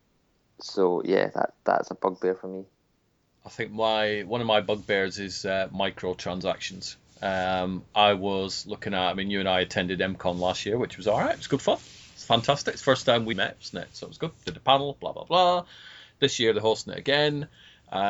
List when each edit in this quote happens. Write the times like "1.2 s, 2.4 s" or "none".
13.3 s